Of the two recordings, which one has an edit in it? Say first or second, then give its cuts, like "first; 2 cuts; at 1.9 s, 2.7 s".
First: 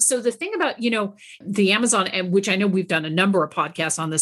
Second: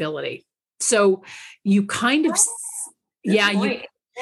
first; 1 cut; at 1.4 s